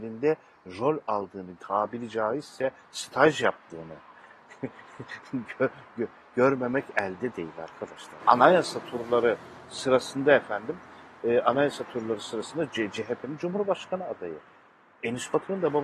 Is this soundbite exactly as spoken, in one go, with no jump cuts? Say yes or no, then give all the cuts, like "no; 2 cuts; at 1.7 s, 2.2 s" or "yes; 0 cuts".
no; 2 cuts; at 1.6 s, 8.2 s